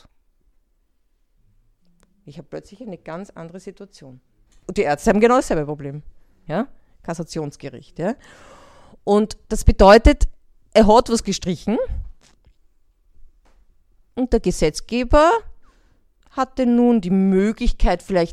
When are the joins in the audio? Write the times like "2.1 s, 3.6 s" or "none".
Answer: 4.5 s, 6.5 s